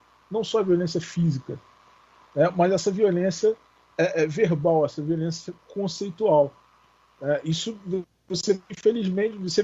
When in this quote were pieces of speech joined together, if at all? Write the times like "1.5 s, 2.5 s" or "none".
none